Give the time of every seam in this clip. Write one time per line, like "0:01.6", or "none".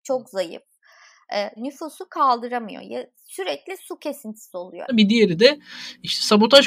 0:01.6
0:04.9